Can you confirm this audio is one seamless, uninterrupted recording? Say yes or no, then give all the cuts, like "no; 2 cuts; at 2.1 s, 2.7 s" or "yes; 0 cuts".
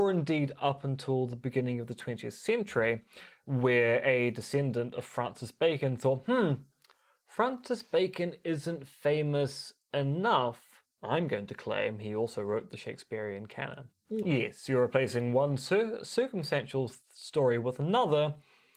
no; 2 cuts; at 10.9 s, 14.2 s